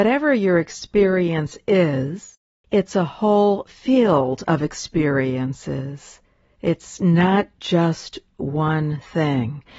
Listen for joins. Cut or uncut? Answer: uncut